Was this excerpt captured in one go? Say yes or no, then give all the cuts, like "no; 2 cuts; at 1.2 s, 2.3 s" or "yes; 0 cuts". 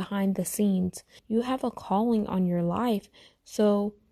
no; 1 cut; at 1.2 s